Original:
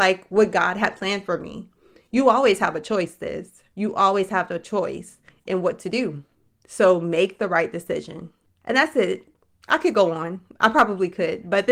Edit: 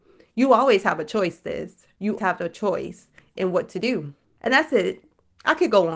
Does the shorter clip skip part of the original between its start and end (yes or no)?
yes